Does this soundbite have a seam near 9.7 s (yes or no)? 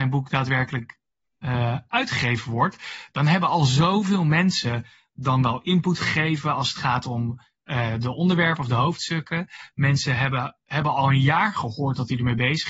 no